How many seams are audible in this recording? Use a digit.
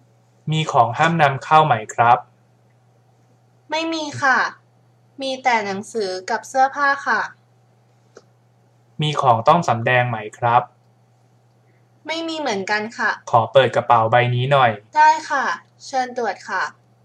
2